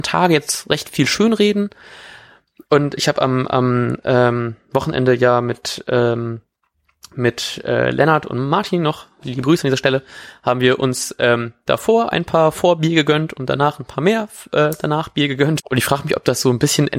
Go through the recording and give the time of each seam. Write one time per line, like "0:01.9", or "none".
0:15.6